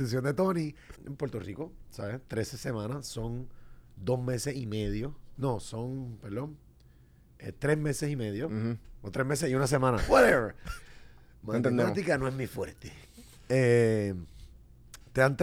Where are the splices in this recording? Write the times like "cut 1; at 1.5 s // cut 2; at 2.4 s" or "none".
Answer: cut 1; at 0.9 s